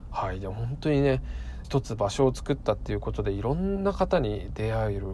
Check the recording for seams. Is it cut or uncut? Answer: cut